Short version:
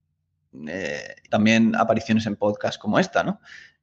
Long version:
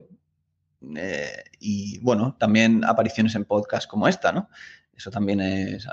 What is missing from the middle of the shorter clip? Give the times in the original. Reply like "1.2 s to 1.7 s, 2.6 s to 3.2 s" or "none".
1.6 s to 2.4 s